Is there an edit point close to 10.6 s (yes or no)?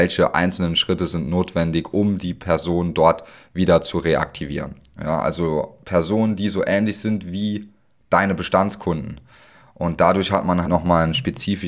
yes